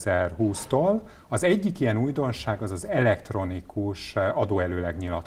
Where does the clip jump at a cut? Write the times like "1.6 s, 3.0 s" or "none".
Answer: none